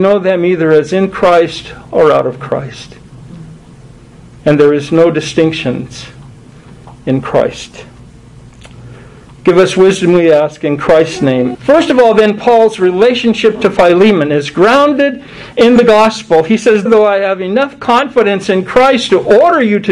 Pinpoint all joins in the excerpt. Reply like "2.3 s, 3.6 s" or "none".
11.5 s, 16.9 s